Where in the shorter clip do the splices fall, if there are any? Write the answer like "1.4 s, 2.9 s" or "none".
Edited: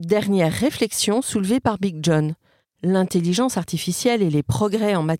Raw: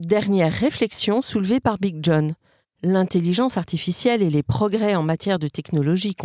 none

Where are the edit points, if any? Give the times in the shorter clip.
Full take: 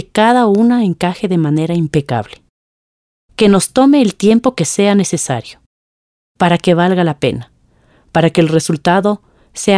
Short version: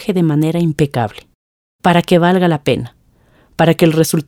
1.6 s

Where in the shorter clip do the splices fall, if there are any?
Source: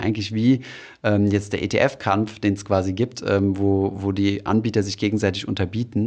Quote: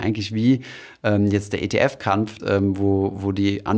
2.4 s

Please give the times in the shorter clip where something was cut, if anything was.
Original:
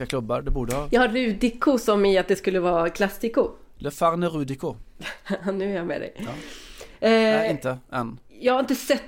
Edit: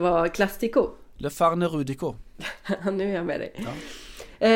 none

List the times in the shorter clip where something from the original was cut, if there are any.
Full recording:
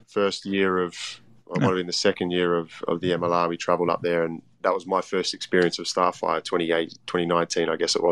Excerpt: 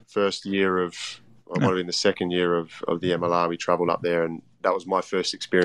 none

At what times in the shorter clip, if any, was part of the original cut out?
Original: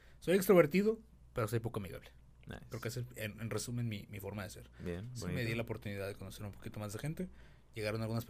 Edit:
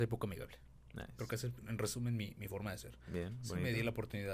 1.6 s

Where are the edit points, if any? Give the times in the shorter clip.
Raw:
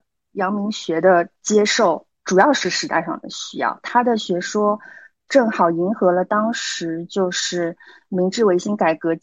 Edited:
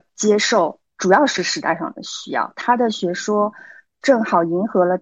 none

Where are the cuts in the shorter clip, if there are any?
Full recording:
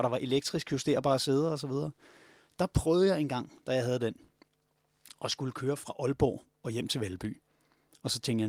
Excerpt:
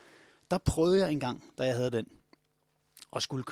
none

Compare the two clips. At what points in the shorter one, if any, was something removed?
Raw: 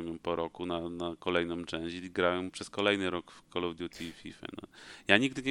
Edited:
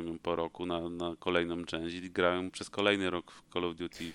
none

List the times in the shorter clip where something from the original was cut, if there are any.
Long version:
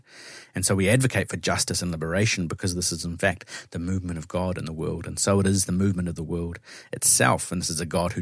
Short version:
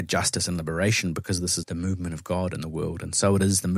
1.6 s

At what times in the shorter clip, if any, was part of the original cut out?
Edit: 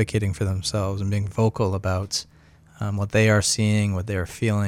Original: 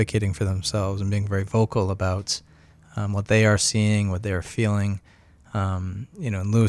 1.3 s

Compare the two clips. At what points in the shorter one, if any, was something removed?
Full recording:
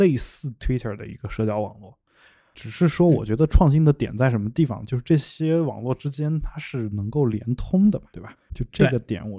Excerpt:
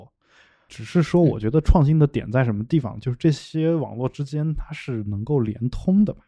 none

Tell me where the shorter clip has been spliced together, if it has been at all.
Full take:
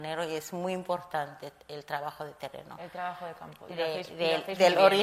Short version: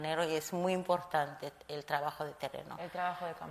none

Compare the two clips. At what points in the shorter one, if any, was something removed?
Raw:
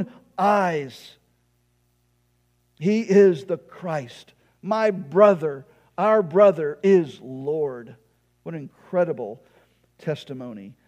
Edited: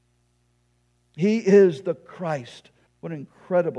2.9 s

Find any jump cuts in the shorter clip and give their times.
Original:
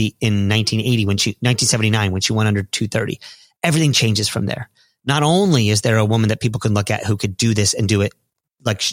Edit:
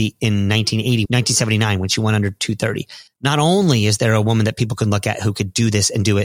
1.1 s, 3.1 s

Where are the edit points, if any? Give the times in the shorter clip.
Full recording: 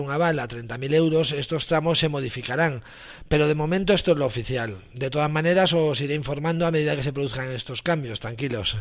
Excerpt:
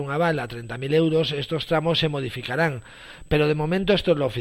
none

